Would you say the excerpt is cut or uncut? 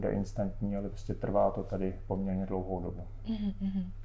uncut